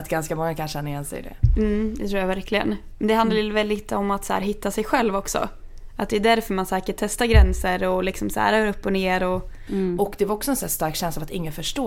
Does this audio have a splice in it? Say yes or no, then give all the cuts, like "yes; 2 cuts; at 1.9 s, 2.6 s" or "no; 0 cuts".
yes; 1 cut; at 9.7 s